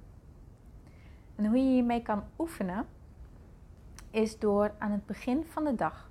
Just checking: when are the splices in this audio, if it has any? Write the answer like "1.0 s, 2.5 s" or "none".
none